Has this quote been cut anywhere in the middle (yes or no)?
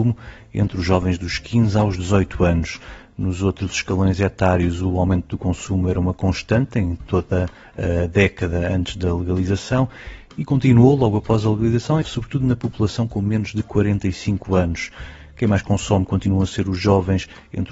yes